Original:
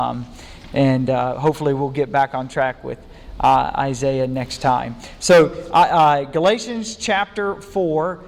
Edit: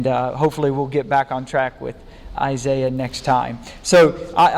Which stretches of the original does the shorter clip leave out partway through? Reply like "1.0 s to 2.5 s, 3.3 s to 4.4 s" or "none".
3.4 s to 3.7 s